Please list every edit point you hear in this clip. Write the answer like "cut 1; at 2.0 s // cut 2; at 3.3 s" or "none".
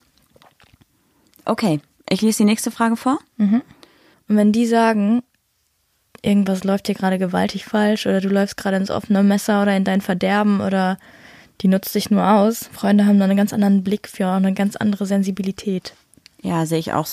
cut 1; at 4.1 s